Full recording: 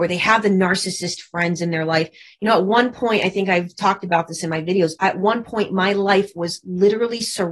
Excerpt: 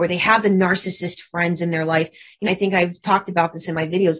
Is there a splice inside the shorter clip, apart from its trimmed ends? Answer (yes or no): yes